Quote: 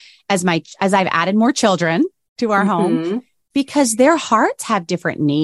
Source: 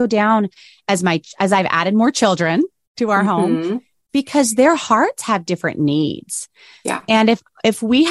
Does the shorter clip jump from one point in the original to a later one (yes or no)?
no